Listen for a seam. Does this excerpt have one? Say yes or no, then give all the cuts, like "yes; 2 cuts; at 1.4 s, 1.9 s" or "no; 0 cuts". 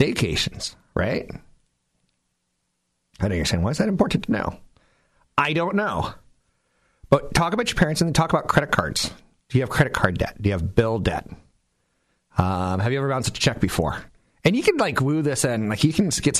no; 0 cuts